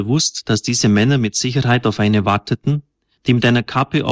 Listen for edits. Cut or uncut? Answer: uncut